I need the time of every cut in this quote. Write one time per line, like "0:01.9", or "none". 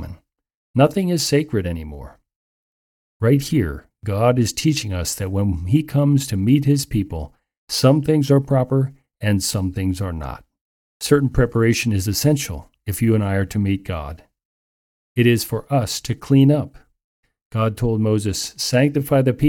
0:10.9